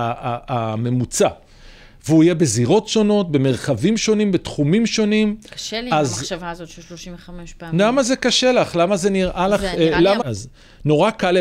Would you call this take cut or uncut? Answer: cut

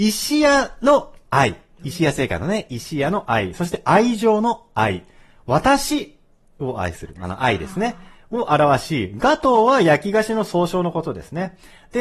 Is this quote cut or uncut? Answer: uncut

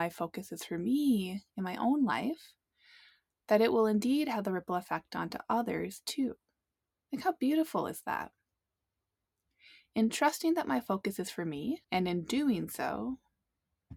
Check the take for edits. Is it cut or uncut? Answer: cut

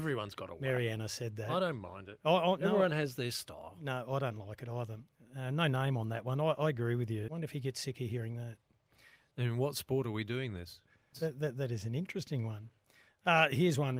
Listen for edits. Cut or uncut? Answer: cut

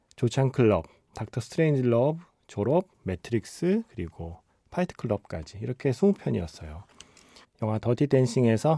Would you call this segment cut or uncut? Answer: cut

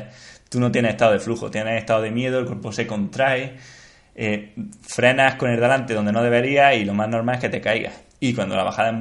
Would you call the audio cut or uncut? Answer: uncut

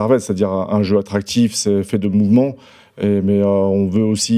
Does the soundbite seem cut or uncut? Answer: uncut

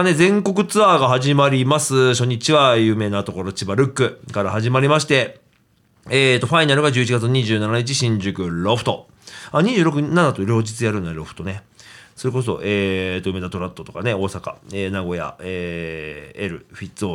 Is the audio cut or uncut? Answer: uncut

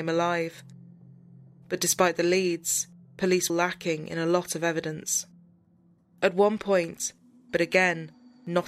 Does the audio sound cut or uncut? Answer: cut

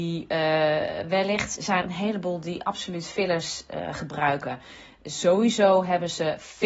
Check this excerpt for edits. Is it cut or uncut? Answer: cut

